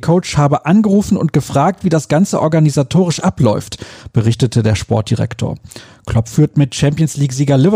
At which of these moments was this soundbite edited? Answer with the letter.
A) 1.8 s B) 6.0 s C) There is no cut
C